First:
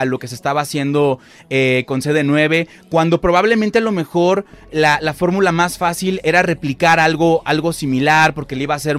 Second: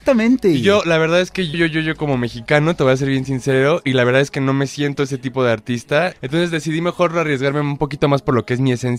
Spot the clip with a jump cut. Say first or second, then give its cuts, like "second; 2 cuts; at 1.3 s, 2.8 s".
second; 2 cuts; at 1.5 s, 6.1 s